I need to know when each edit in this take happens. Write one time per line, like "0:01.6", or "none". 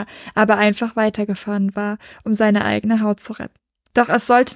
none